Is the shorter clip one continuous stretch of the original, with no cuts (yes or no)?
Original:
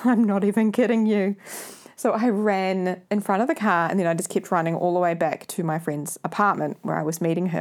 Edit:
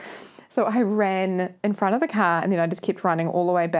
yes